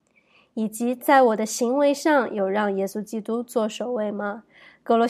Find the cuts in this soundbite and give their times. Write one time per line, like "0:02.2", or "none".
none

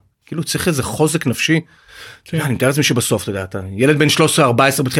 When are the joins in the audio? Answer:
none

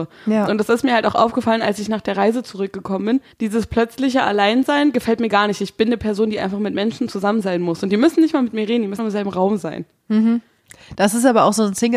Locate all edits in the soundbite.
0:03.3
0:09.0

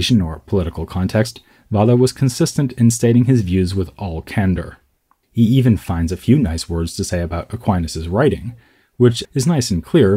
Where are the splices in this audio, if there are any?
0:05.2
0:09.2

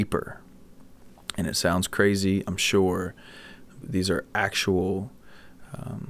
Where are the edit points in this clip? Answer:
0:03.8

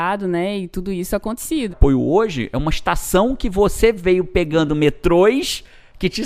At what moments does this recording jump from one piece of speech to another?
0:01.7

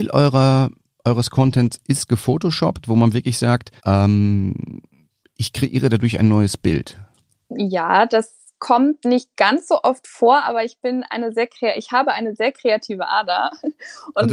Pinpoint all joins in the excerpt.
0:03.8

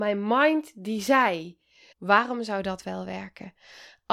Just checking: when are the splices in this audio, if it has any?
0:01.9

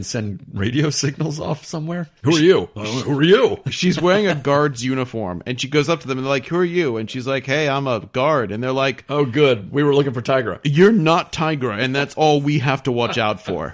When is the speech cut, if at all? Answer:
0:02.2

